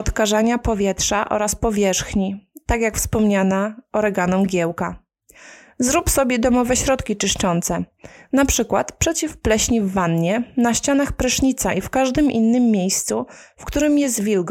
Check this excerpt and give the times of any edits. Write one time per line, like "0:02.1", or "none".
none